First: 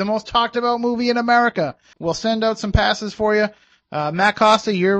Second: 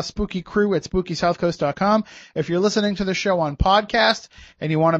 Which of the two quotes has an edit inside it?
first; 1 cut; at 1.9 s

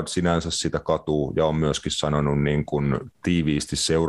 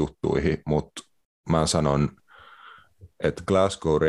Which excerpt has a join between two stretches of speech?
second; 1 cut; at 3.1 s

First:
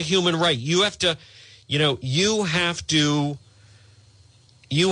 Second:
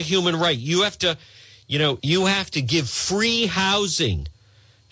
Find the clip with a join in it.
second; 1 cut; at 2.0 s

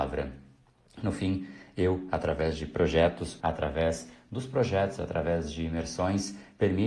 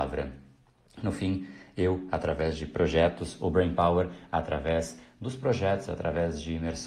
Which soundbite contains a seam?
first; 1 cut; at 3.4 s

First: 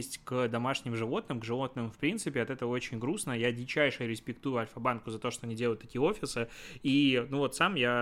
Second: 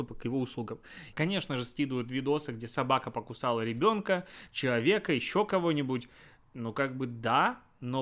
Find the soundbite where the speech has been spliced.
second; 1 cut; at 1.1 s

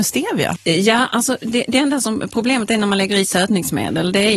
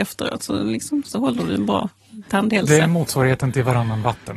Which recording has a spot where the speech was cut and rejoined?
second; 1 cut; at 1.1 s

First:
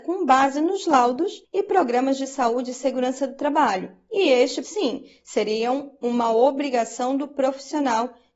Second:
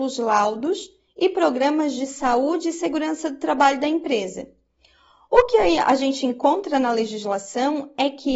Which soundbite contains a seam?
first; 1 cut; at 4.6 s

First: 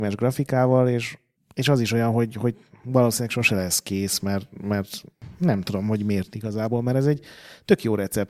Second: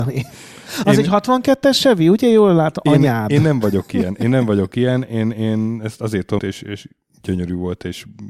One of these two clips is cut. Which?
second; 1 cut; at 6.4 s

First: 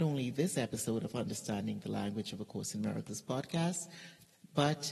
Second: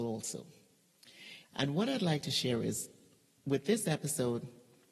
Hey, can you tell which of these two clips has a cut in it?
second; 1 cut; at 1.4 s

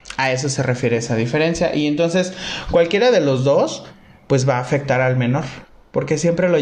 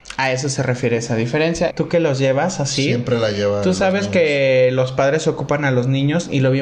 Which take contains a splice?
second; 1 cut; at 1.7 s

